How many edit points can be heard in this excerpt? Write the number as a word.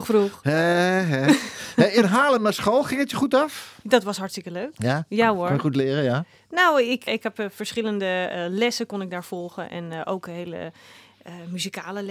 one